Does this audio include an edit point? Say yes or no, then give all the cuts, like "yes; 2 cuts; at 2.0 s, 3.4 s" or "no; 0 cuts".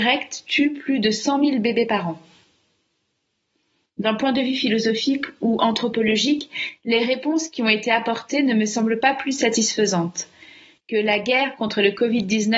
no; 0 cuts